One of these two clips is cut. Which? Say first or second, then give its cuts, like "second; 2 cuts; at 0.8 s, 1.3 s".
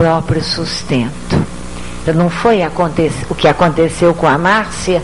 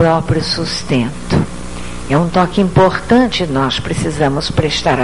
first; 1 cut; at 2.1 s